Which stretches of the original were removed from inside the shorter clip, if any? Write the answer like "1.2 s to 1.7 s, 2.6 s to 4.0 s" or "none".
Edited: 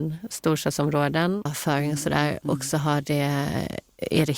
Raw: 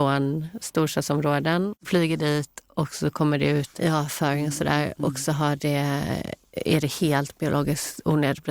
1.8 s to 4.0 s